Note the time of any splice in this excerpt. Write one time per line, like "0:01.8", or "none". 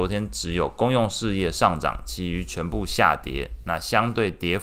none